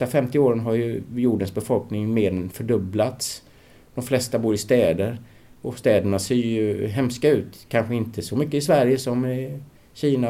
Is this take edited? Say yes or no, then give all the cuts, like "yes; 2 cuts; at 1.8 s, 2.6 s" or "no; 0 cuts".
no; 0 cuts